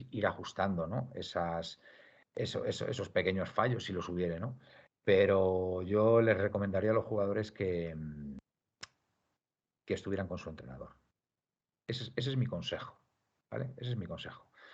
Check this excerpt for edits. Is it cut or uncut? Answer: uncut